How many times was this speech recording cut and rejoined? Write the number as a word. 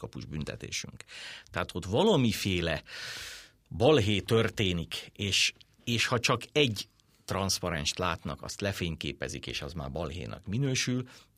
zero